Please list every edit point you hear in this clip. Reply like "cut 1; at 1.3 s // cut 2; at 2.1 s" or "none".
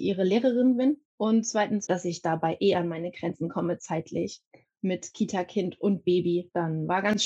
cut 1; at 1.9 s